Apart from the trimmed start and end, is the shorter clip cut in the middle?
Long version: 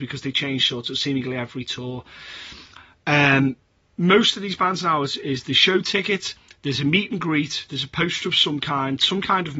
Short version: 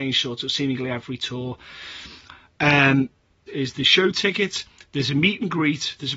yes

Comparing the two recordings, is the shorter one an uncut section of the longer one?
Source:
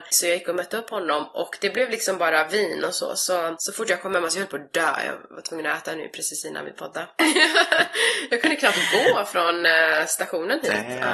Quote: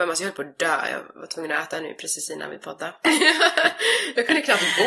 yes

